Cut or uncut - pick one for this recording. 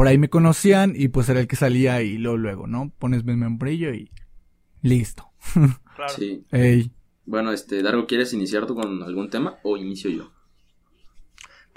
cut